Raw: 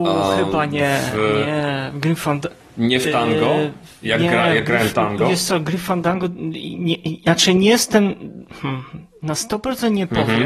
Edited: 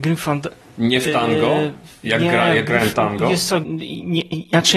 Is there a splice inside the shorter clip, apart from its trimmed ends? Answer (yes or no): yes